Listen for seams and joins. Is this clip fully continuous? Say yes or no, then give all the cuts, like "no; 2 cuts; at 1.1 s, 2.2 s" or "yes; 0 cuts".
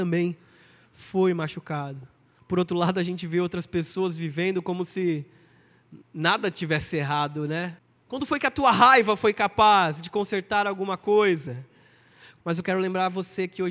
no; 3 cuts; at 2.4 s, 8.0 s, 12.4 s